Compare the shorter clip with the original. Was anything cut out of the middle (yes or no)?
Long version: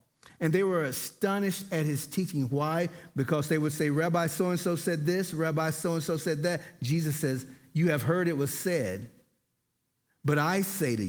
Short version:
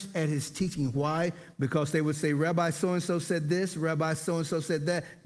no